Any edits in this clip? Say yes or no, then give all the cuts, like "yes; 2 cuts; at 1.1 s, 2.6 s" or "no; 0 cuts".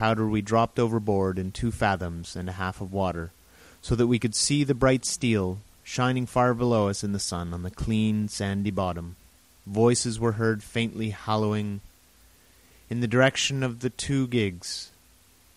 yes; 1 cut; at 9.6 s